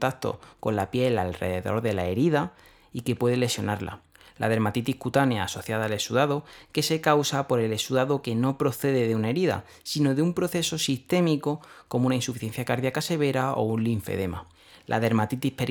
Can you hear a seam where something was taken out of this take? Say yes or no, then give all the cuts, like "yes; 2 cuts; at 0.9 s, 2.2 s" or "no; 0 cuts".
no; 0 cuts